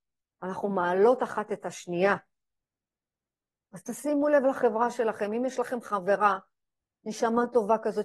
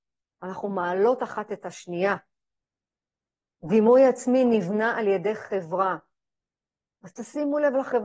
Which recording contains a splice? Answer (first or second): first